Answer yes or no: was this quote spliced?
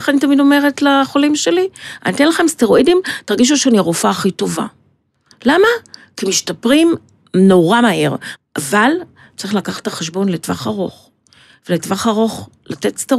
yes